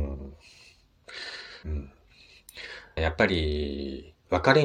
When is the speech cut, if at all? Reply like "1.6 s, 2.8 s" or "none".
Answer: 1.6 s, 3.0 s